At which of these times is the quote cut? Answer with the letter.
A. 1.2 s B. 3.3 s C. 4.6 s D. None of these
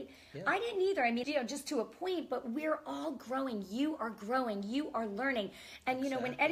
A